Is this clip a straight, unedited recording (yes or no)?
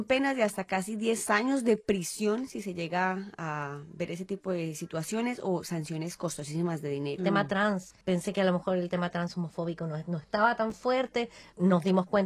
no